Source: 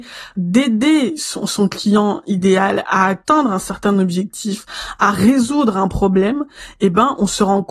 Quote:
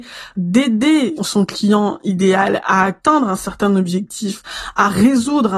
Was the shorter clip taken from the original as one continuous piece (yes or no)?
no